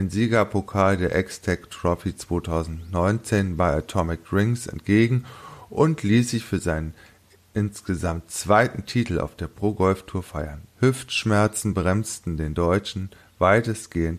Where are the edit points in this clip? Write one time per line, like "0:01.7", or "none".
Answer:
0:10.7